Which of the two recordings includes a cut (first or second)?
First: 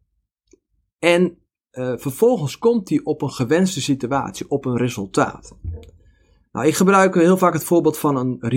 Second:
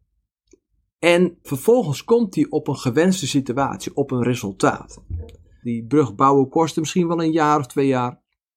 second